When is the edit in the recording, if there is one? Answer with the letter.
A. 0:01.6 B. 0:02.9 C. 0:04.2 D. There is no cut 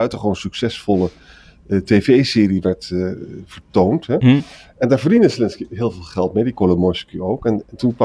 D